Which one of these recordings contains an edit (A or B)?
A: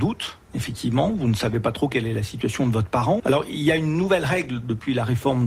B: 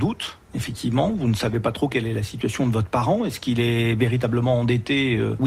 A